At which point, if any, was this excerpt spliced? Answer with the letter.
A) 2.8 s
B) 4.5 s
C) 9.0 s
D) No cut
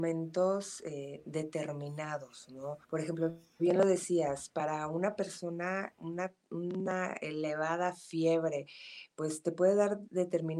A